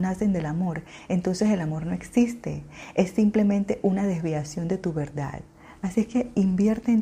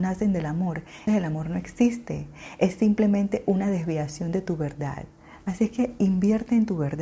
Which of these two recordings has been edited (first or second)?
second